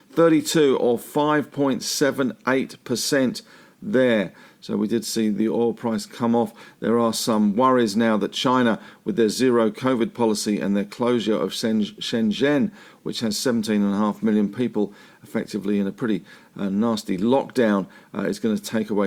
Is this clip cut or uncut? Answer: uncut